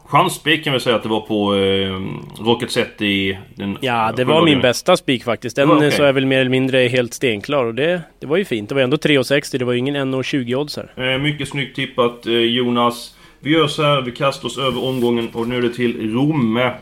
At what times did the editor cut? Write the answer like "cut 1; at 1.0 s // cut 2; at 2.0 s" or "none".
none